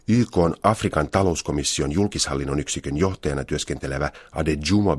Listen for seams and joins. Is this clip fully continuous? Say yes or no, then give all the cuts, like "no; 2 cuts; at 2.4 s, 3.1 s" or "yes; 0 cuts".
yes; 0 cuts